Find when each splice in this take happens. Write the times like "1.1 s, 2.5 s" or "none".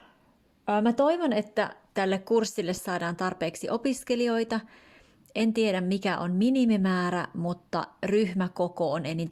none